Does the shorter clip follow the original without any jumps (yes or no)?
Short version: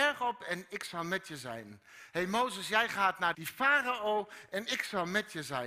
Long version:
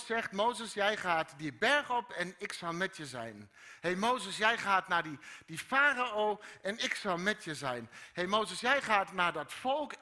no